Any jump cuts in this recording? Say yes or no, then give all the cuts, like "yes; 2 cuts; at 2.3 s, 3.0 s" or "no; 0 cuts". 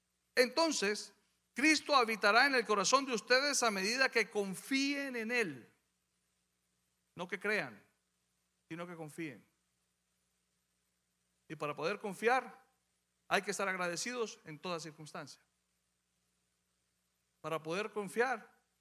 no; 0 cuts